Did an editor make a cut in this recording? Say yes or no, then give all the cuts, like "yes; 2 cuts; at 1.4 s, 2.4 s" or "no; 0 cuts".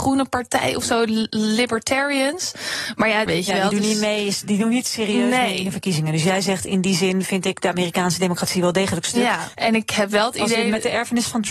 yes; 2 cuts; at 3.3 s, 9.5 s